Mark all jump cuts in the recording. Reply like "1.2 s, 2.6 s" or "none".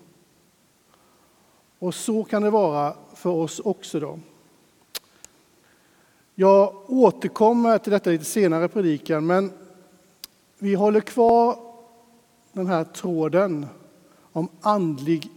none